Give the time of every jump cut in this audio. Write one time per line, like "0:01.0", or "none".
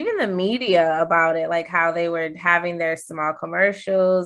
none